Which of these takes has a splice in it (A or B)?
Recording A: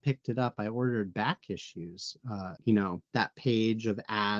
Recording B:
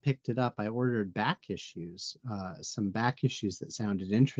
A